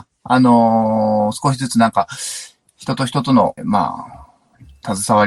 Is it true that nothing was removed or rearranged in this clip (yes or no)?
no